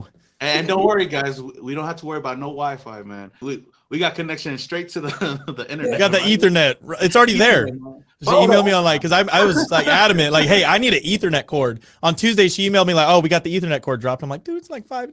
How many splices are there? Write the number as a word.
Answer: one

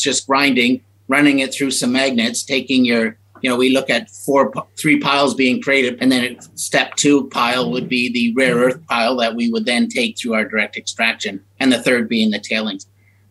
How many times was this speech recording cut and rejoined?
one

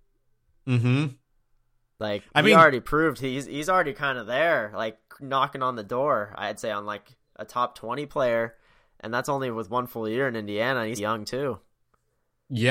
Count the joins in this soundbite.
one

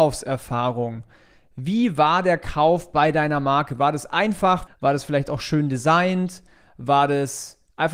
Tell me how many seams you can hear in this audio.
one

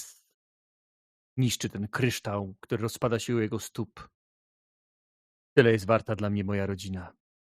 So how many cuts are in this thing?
zero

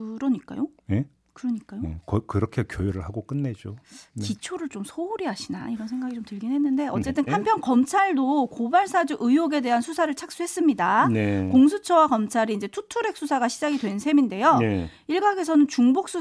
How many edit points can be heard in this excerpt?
one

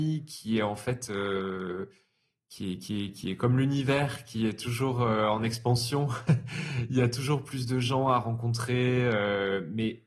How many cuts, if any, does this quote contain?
zero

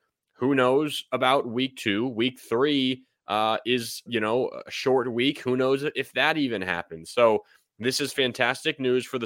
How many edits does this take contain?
one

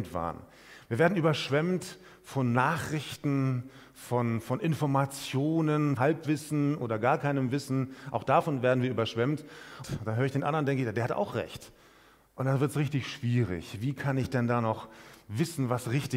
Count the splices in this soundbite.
two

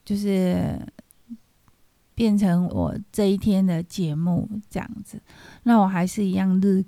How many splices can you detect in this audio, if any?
one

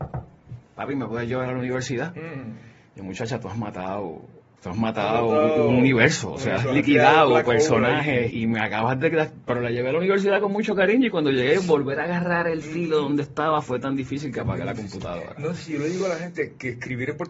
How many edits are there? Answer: two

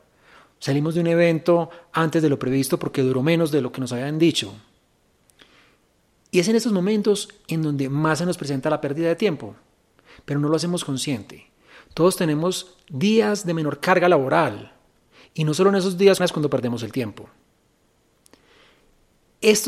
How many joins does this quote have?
two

